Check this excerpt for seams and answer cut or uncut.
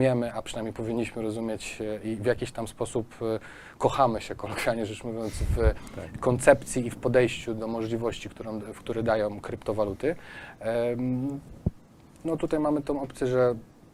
uncut